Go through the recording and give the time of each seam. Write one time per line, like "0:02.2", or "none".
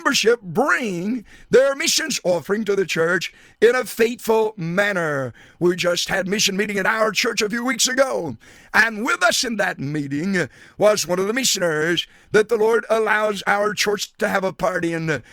none